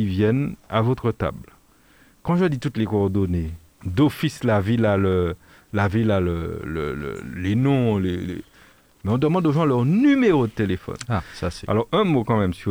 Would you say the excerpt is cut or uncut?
cut